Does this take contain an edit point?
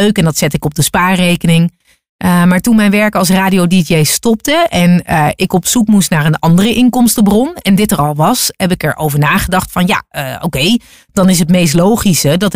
no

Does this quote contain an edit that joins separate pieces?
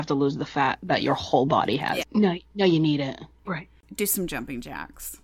yes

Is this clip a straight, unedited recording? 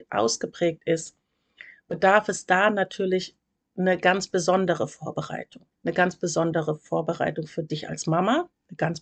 no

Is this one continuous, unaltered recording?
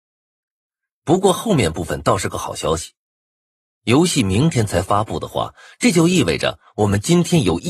no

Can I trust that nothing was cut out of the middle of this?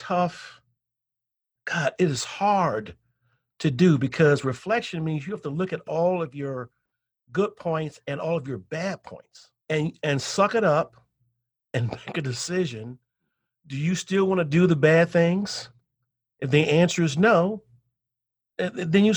no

